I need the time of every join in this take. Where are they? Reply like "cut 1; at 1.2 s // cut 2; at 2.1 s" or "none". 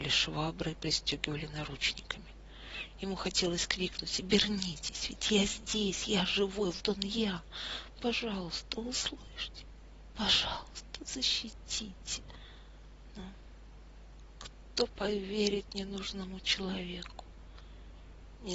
cut 1; at 6.8 s